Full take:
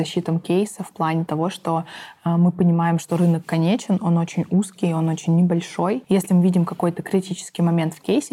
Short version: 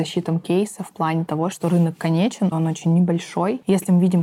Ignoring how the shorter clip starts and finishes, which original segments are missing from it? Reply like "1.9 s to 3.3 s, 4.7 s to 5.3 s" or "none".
1.5 s to 3.0 s, 4.0 s to 4.9 s